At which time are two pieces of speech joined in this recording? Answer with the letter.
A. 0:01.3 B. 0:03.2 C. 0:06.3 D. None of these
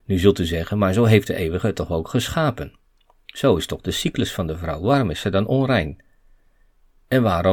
D